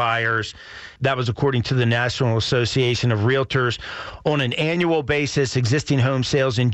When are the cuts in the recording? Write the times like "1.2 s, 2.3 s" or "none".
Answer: 1.0 s